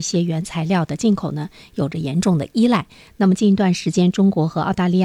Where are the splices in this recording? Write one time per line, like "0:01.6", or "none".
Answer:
none